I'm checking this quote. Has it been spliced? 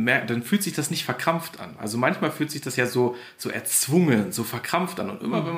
no; 0 cuts

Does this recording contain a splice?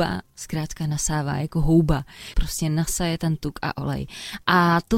yes; 1 cut; at 2.3 s

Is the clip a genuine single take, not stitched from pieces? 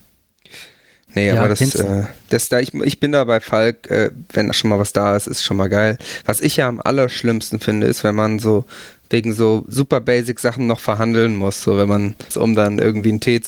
no; 2 cuts; at 4.5 s, 12.3 s

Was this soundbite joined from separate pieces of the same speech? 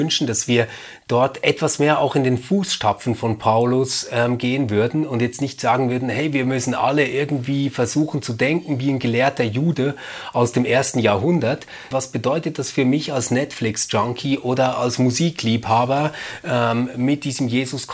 yes; 1 cut; at 11.9 s

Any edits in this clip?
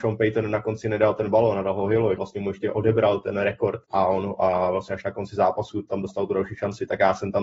yes; 2 cuts; at 2.2 s, 3.8 s

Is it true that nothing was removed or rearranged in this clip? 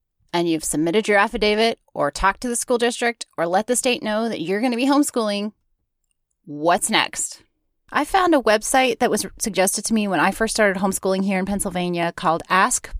no; 1 cut; at 7.9 s

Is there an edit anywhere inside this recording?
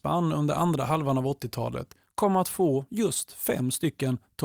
no; 0 cuts

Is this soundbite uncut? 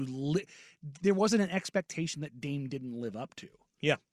yes; 0 cuts

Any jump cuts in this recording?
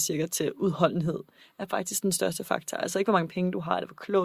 no; 0 cuts

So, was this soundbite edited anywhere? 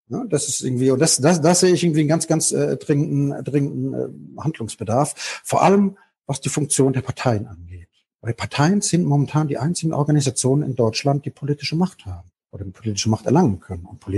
no; 0 cuts

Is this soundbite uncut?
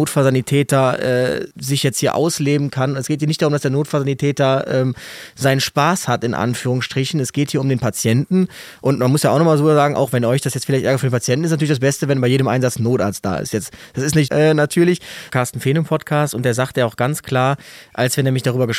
no; 3 cuts; at 1.5 s, 14.3 s, 15.3 s

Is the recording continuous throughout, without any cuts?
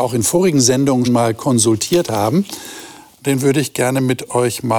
no; 2 cuts; at 1.0 s, 3.1 s

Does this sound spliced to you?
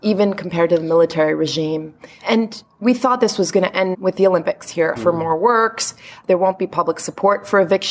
yes; 2 cuts; at 3.9 s, 5.0 s

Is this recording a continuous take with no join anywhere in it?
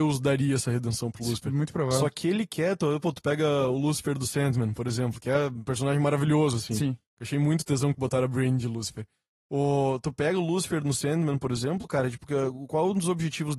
yes; 0 cuts

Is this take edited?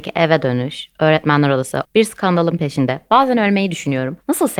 yes; 1 cut; at 1.8 s

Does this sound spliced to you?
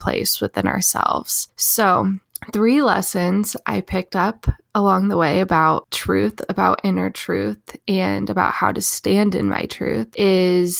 no; 0 cuts

